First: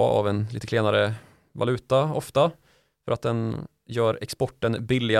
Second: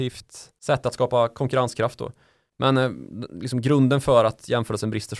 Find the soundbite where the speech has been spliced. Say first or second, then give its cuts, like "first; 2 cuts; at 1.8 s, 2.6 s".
second; 1 cut; at 2.5 s